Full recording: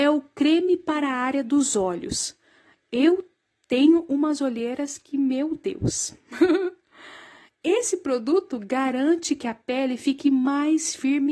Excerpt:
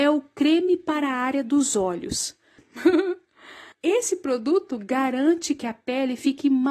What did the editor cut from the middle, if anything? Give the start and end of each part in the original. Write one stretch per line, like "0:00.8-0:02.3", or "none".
0:02.6-0:06.1
0:07.3-0:07.5